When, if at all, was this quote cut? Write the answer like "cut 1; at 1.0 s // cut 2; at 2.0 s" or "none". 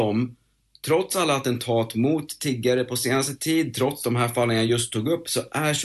none